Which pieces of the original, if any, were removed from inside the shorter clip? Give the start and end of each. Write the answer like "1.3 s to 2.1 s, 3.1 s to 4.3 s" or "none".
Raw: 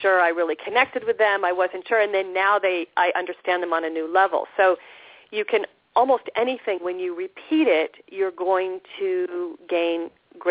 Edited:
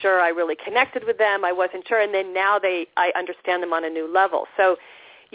none

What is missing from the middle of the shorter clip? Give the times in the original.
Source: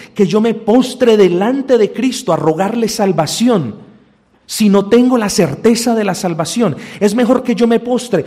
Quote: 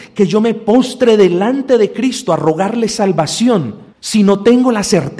3.9 s to 4.4 s

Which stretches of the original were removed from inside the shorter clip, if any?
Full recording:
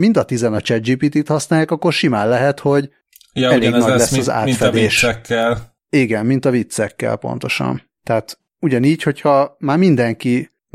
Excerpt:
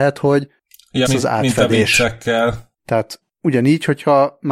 3.5 s to 4.1 s, 5.8 s to 8.0 s

